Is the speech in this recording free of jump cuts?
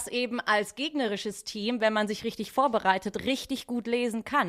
yes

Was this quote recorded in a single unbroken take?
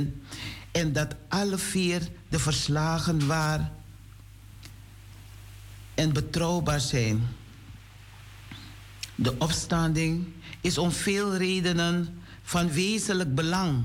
yes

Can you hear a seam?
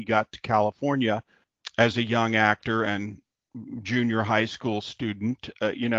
no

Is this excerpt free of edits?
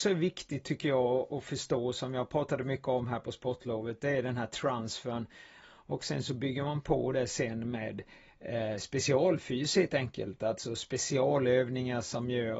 no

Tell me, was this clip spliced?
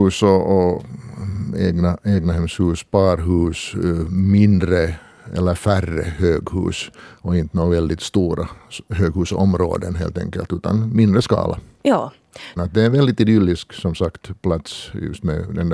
yes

